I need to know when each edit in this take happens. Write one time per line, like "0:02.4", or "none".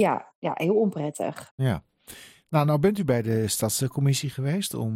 none